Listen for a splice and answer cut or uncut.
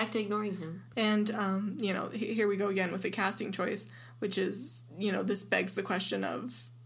cut